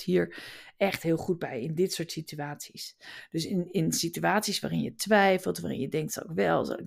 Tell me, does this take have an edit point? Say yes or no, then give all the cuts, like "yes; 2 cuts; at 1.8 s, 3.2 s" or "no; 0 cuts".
no; 0 cuts